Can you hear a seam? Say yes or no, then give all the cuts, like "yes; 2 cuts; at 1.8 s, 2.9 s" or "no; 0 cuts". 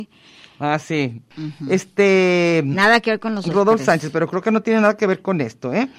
yes; 1 cut; at 1.3 s